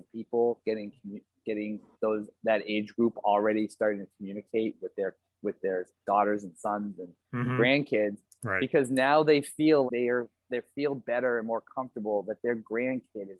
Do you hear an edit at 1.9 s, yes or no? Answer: yes